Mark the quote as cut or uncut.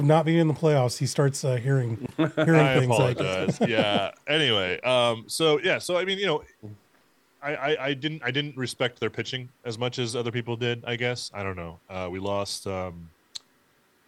cut